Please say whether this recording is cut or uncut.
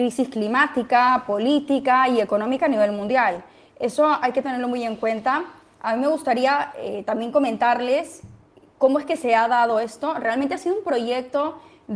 uncut